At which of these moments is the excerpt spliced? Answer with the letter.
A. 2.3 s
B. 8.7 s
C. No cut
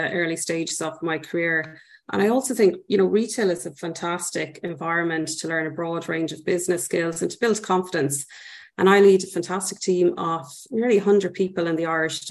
B